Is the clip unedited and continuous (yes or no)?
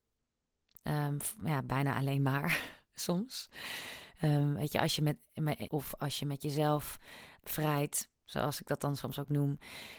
no